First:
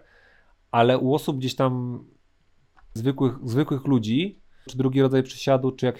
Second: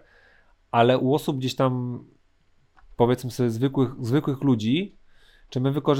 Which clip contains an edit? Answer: first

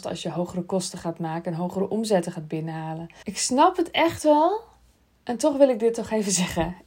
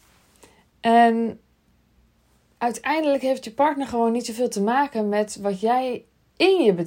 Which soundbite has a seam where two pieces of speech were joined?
first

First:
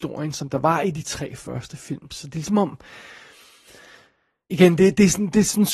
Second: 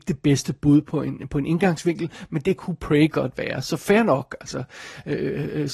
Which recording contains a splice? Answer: first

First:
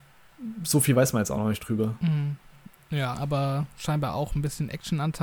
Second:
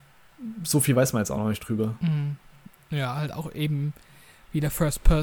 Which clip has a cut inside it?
first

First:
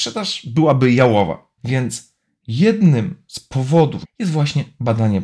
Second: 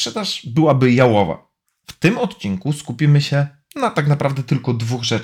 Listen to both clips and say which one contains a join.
first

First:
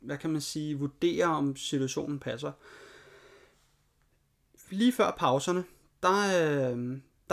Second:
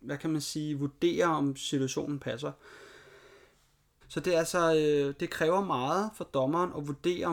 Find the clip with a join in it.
second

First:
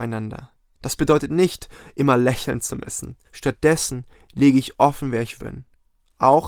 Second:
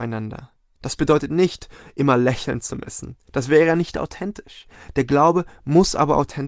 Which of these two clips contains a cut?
first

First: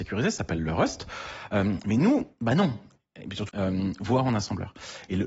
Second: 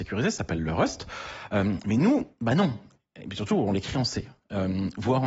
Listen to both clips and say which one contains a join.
first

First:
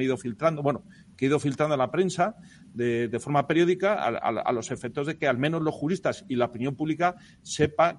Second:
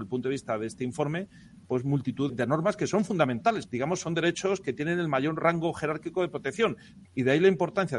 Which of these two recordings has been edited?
second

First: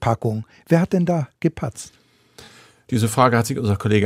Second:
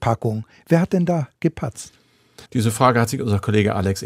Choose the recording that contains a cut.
second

